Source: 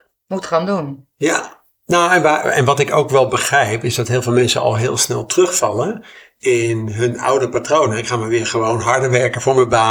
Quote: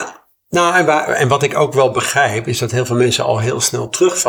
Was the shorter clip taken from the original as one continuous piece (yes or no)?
yes